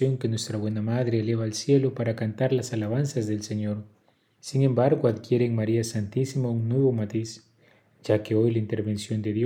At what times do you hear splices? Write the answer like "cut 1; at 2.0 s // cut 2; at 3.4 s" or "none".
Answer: cut 1; at 4.4 s

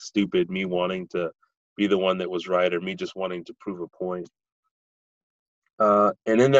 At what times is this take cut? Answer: none

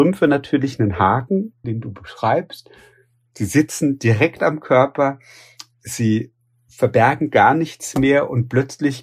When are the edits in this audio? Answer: cut 1; at 1.6 s

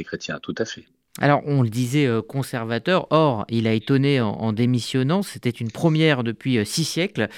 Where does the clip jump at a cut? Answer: none

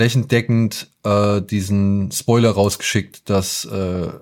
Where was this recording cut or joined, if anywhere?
none

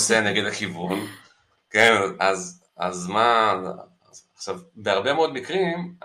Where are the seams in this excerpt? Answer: cut 1; at 2.7 s

